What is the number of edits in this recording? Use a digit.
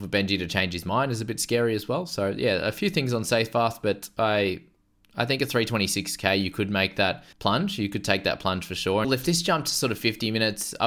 2